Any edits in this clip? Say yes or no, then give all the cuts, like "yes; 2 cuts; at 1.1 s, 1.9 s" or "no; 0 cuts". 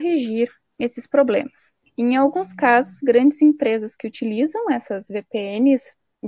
yes; 1 cut; at 1.8 s